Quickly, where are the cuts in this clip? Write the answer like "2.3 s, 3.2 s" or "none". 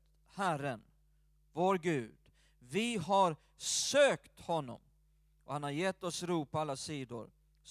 none